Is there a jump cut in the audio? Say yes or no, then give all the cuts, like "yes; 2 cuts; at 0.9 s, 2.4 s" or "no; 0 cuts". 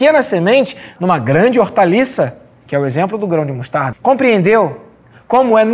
yes; 2 cuts; at 1.0 s, 3.9 s